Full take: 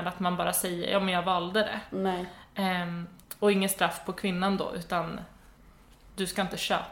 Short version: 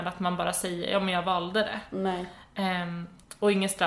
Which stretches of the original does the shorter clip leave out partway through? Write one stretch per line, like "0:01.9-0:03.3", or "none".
none